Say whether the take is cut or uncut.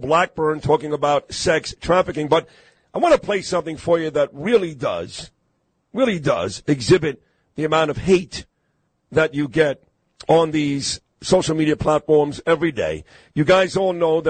uncut